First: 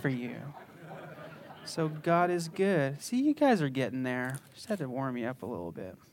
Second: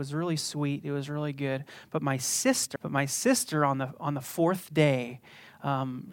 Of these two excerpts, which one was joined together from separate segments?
second; 1 cut; at 2.8 s

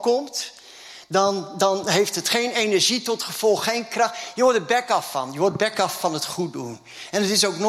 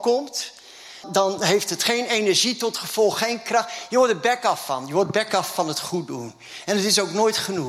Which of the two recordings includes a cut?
second; 1 cut; at 1.0 s

